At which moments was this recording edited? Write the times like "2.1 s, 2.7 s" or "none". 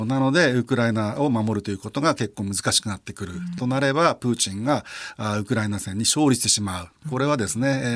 none